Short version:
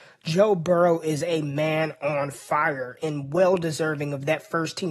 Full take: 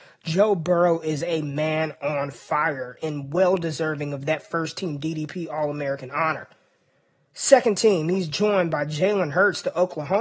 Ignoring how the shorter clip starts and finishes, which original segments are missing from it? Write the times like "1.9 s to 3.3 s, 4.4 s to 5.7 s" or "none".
none